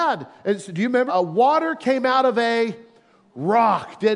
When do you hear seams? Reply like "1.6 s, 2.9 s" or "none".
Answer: 1.1 s